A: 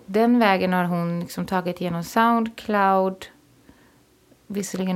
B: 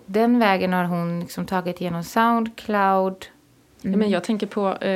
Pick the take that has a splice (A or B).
B